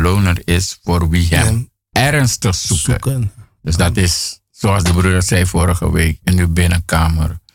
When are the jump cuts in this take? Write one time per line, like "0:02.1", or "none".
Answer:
none